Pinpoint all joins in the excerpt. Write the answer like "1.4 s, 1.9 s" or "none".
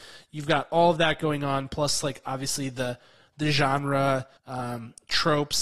4.4 s